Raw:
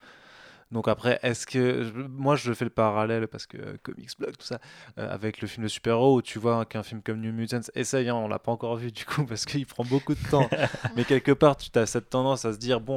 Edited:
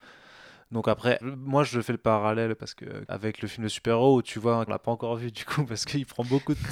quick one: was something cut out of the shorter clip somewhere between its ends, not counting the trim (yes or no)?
yes